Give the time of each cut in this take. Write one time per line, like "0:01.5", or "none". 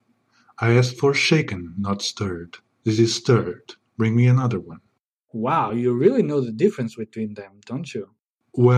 none

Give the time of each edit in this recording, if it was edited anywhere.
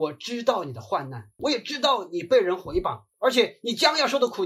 0:01.4
0:03.1

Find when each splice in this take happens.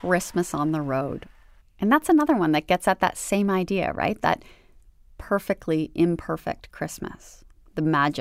0:01.6

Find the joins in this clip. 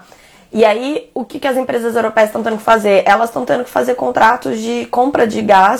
none

